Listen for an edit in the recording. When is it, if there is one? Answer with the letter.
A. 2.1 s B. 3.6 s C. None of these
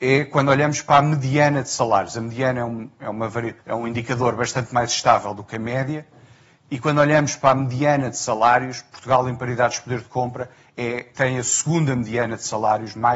B